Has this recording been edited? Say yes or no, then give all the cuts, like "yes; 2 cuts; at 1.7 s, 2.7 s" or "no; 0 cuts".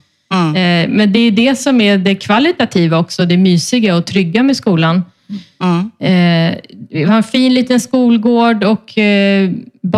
no; 0 cuts